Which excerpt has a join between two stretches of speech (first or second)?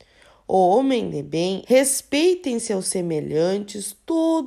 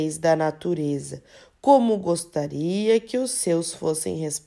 first